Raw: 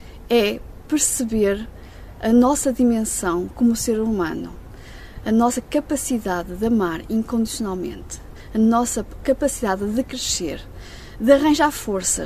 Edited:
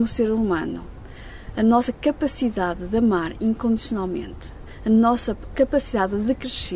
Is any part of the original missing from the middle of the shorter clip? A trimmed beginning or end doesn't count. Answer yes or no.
no